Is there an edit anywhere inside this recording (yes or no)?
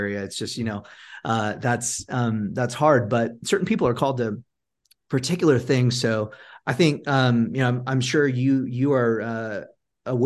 no